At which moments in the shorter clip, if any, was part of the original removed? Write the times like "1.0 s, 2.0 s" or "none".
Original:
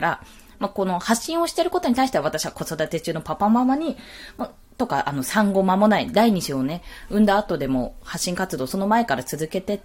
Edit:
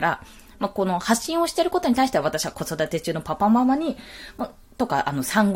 none